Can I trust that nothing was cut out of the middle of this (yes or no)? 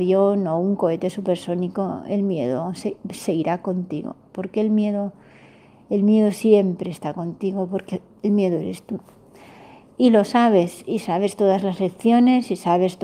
yes